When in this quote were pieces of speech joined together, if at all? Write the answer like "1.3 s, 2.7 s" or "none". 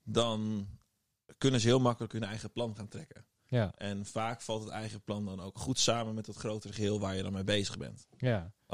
none